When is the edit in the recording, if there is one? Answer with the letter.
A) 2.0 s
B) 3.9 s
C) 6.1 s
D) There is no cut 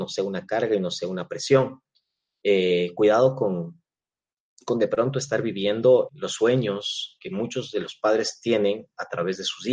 C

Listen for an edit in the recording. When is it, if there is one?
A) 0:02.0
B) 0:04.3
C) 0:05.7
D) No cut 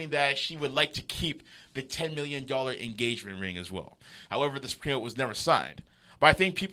B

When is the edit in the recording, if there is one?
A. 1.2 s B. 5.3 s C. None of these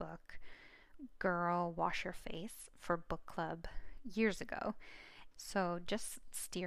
B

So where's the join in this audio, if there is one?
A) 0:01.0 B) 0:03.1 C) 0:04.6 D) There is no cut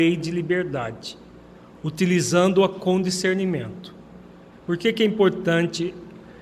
C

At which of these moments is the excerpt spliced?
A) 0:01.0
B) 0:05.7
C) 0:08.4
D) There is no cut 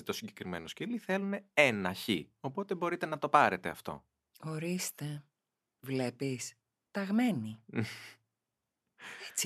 D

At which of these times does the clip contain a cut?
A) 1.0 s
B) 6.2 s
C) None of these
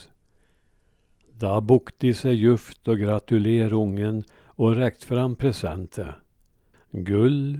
C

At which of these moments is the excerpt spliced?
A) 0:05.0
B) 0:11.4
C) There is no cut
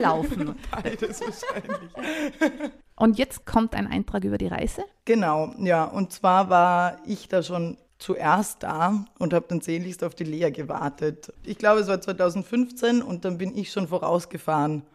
B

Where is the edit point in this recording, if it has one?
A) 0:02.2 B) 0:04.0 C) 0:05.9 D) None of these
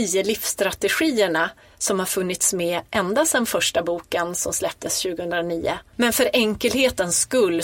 C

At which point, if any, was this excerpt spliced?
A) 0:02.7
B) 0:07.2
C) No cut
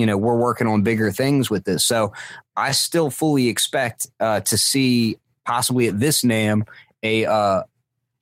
C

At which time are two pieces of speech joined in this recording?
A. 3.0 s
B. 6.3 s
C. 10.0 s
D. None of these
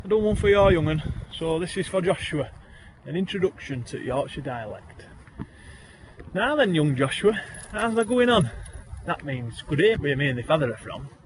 C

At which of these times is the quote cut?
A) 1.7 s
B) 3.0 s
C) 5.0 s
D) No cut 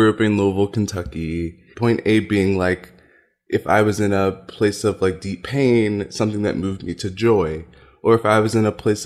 A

